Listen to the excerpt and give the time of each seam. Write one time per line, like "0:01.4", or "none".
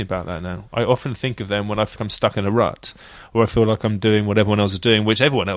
0:02.0